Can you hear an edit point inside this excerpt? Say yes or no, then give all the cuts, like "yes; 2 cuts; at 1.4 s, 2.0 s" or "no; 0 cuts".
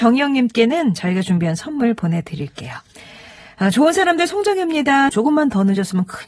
yes; 1 cut; at 5.1 s